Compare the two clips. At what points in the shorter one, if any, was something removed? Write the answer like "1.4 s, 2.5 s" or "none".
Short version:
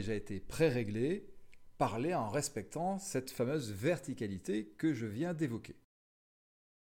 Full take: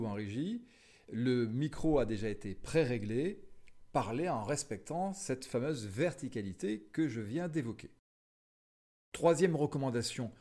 none